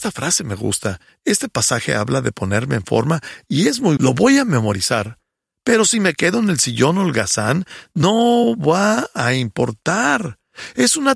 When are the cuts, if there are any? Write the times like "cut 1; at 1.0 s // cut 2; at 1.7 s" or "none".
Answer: cut 1; at 4.0 s